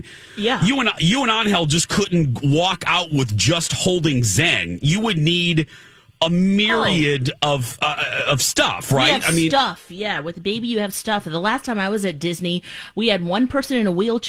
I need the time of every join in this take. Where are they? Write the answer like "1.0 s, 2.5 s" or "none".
none